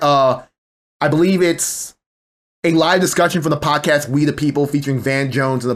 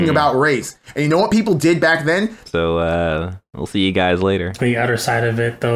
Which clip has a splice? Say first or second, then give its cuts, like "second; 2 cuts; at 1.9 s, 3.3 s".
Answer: second; 2 cuts; at 2.5 s, 4.6 s